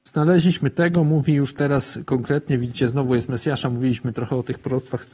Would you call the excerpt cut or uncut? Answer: uncut